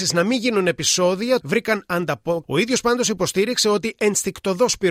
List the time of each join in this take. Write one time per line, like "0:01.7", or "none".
0:01.4
0:02.4

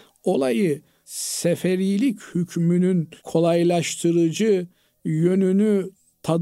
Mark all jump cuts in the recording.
0:03.2

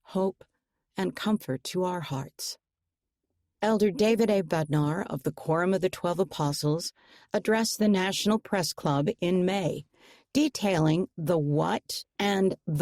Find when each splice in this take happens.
0:03.6

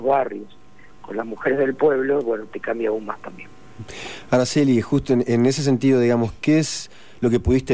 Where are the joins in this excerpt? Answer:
none

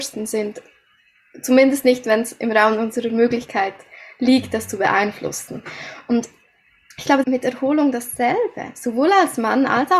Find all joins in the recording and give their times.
0:07.2

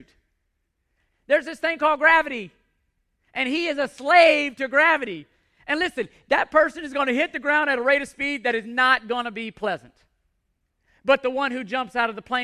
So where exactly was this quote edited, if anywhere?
0:01.1

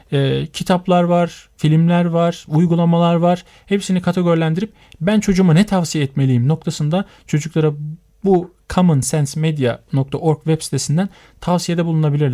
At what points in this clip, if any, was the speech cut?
0:02.4

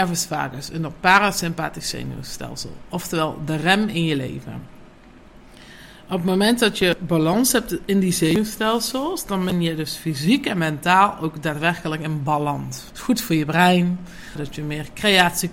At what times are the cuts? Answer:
0:12.9
0:14.4

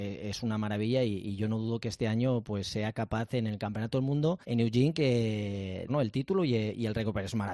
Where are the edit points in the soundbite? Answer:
0:04.4
0:05.9

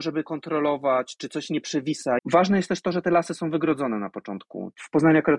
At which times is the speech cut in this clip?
0:02.2

